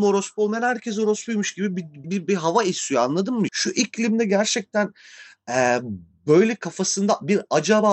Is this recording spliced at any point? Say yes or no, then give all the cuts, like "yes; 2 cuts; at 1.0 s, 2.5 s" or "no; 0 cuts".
yes; 2 cuts; at 2.0 s, 3.5 s